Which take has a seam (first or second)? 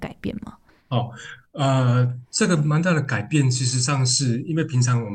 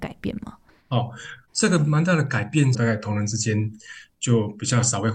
second